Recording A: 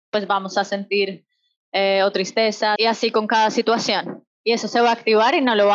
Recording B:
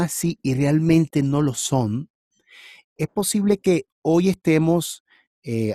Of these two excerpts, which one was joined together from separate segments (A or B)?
A